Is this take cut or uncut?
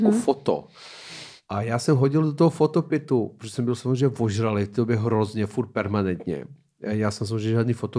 uncut